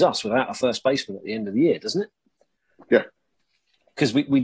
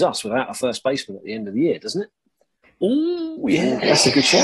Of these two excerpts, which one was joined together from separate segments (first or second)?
second